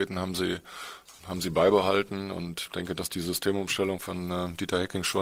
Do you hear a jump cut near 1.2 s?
yes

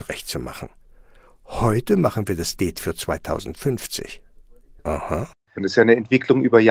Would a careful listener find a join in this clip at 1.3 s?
no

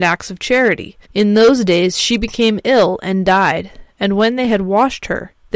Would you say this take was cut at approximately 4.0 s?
no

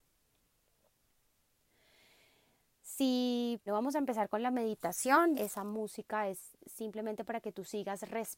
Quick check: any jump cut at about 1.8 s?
no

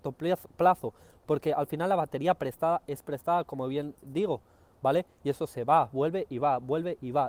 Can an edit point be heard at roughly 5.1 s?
no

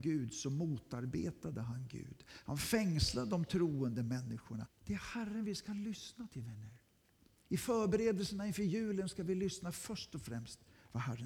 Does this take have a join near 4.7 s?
yes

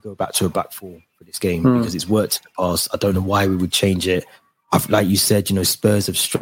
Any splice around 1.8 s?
no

